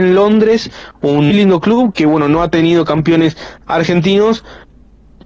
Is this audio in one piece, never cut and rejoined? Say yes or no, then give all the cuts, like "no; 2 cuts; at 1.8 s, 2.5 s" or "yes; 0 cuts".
no; 1 cut; at 1.3 s